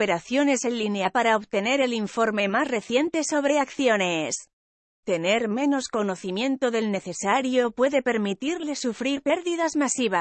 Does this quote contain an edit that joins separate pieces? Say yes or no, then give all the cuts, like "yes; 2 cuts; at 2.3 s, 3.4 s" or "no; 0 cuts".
yes; 1 cut; at 4.9 s